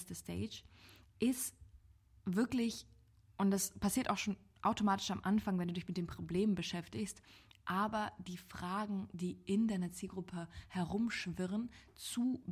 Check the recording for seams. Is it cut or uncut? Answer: uncut